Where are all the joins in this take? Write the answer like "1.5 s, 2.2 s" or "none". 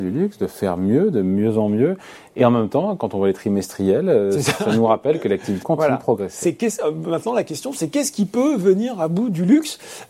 5.6 s

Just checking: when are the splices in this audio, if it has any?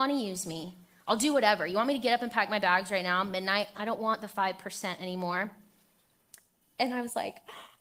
3.7 s, 6.6 s

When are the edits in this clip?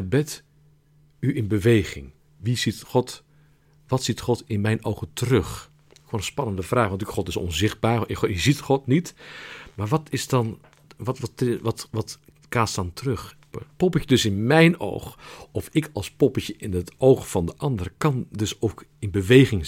2.2 s, 13.5 s

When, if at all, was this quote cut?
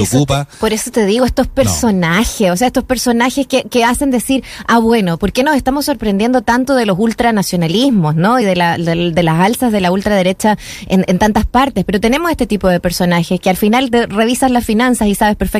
none

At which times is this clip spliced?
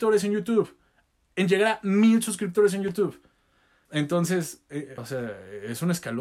3.9 s, 5.0 s

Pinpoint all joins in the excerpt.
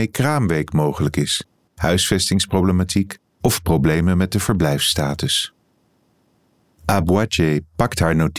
1.7 s

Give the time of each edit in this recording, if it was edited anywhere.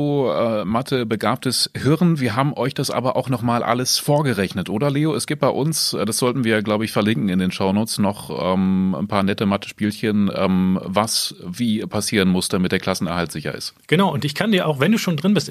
none

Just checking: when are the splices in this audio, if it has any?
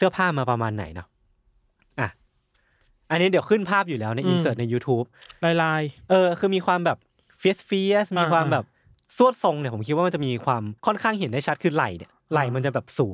10.8 s

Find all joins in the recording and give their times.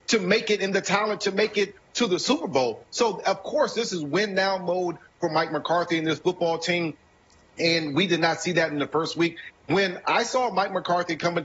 9.5 s

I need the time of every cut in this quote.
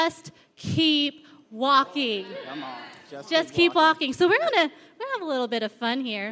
none

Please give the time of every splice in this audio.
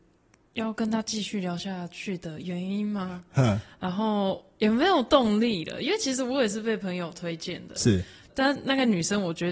8.3 s

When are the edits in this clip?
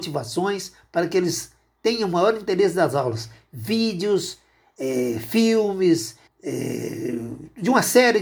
6.3 s

